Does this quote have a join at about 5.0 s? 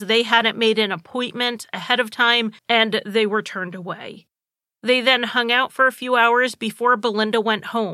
no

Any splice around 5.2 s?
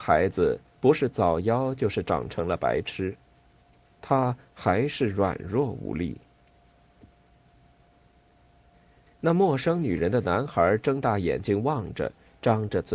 no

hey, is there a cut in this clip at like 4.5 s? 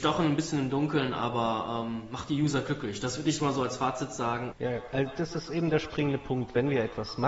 yes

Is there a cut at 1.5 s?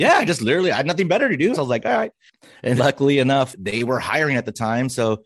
yes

